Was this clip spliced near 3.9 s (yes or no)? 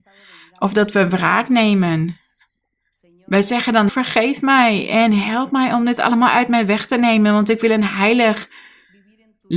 yes